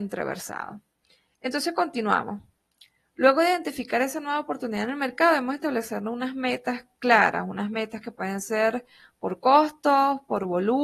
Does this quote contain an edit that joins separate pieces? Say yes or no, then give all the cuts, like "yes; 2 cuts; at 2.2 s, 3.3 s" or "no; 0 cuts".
no; 0 cuts